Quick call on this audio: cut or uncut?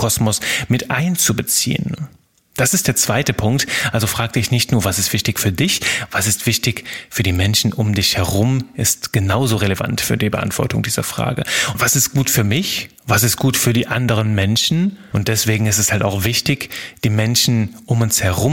cut